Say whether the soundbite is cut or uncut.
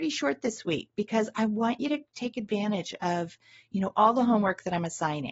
uncut